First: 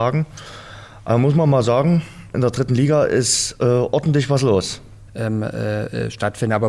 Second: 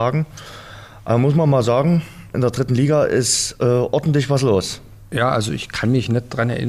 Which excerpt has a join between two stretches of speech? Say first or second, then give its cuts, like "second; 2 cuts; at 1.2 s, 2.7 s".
first; 1 cut; at 5.1 s